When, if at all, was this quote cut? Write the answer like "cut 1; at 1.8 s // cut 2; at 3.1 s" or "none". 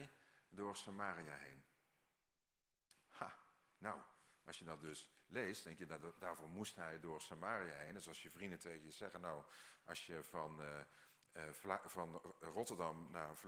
none